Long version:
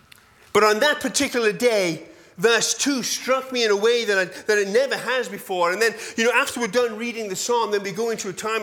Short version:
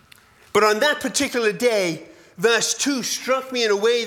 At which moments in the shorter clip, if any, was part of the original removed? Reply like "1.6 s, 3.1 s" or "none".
none